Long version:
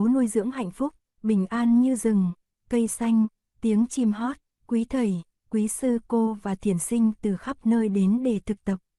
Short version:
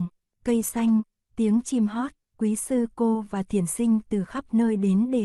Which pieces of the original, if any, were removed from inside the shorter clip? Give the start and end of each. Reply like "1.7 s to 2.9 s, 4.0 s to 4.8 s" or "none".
4.5 s to 5.4 s